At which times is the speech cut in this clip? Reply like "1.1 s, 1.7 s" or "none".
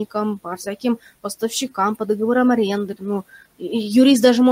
3.0 s